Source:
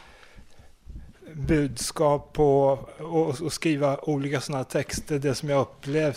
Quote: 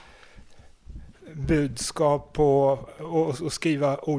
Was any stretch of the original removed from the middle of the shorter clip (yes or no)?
no